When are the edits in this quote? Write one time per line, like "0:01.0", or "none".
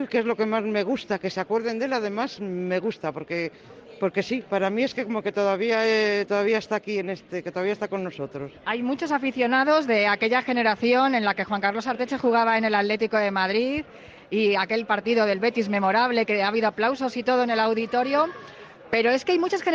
none